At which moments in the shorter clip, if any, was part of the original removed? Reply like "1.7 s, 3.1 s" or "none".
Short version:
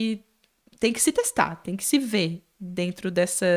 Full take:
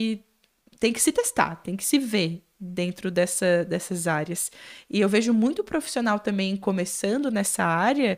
none